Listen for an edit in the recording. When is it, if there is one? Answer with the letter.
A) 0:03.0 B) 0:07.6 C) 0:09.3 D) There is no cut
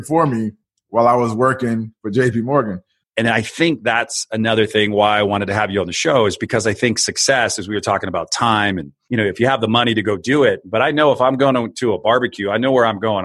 A